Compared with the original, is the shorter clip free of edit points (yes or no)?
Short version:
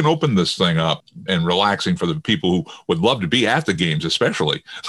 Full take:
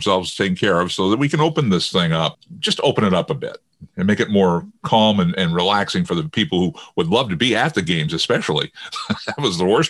no